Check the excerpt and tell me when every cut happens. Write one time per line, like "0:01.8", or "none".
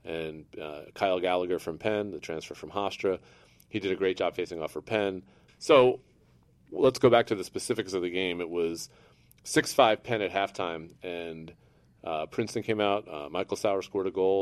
0:05.5